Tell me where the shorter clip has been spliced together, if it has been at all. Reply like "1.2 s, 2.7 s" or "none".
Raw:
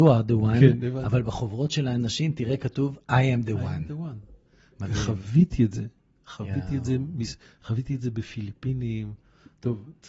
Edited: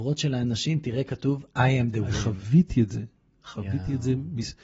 2.1 s